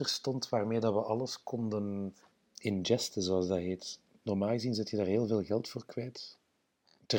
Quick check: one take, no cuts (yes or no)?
no